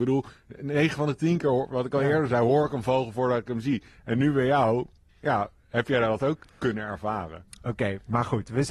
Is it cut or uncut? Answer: uncut